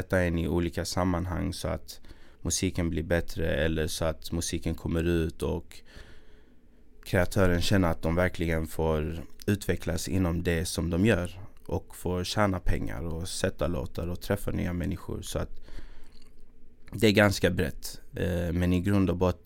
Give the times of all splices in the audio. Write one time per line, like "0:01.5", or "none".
none